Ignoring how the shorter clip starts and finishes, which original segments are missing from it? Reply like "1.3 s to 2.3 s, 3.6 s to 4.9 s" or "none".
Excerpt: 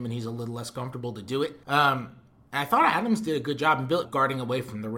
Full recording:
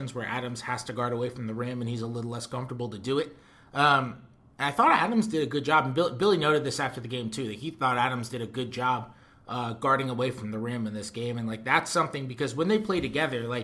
3.4 s to 3.7 s, 6.1 s to 9.7 s